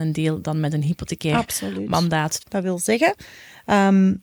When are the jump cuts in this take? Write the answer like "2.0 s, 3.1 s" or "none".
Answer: 2.4 s